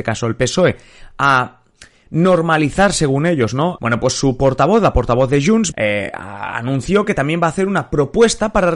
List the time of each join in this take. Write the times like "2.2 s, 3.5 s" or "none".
3.8 s, 5.7 s